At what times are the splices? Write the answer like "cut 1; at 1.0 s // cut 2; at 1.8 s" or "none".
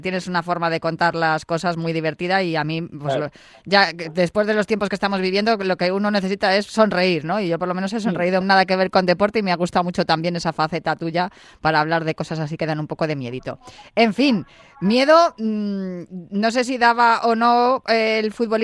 cut 1; at 8.4 s